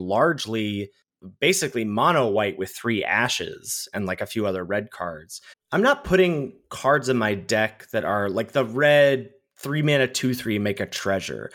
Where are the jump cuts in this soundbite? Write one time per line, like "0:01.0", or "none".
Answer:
0:05.5